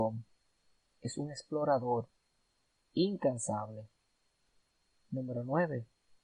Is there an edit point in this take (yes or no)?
no